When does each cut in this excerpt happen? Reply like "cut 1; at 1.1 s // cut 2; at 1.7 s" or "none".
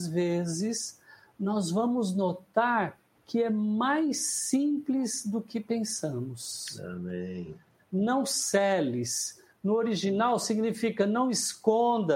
cut 1; at 7.8 s